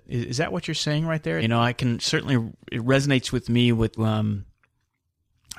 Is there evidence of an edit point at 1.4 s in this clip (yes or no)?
yes